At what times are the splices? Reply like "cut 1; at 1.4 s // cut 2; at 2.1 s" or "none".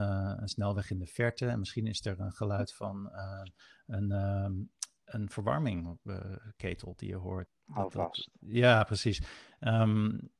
cut 1; at 7.5 s